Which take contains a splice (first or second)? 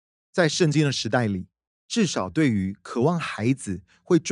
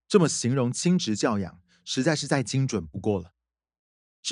first